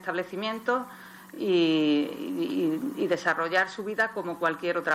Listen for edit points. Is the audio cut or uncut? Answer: uncut